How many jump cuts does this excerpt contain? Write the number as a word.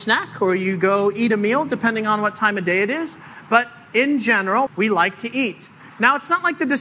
one